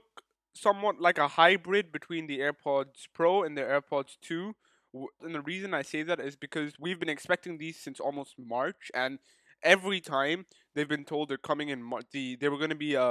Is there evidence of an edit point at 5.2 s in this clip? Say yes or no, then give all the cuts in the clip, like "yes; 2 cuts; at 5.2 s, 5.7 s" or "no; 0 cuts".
yes; 1 cut; at 5.2 s